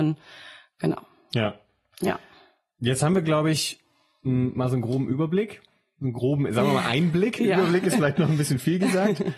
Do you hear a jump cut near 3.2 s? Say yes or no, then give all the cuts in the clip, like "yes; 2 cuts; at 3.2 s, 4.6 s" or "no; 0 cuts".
no; 0 cuts